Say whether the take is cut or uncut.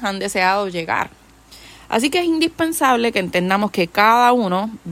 uncut